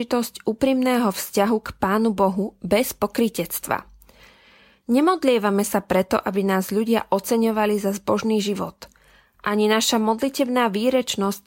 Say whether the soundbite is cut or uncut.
uncut